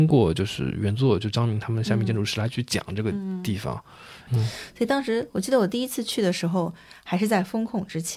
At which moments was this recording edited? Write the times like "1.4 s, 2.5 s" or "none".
4.3 s